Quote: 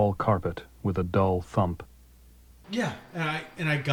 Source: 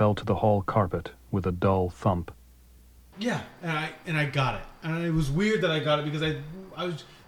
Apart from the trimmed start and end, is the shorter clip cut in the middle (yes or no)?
no